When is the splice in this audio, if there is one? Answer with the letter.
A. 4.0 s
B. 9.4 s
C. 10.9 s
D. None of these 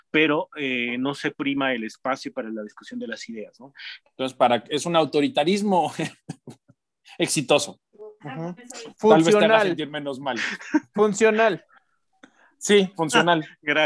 A